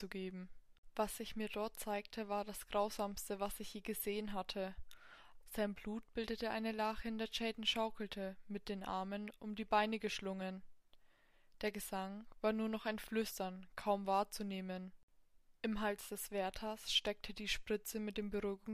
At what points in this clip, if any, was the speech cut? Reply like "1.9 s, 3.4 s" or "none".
5.4 s